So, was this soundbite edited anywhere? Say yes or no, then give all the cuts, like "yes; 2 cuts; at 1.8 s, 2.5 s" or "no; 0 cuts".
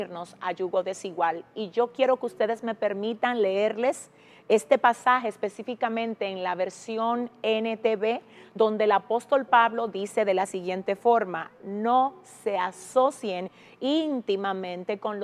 no; 0 cuts